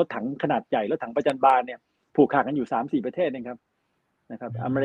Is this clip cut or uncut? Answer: uncut